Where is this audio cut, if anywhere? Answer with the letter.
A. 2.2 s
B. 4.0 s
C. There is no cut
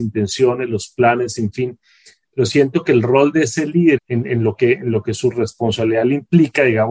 B